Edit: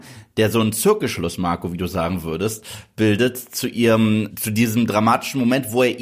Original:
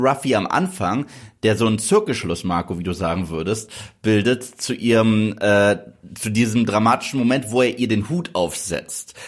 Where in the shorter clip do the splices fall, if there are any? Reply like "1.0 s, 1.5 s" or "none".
4.3 s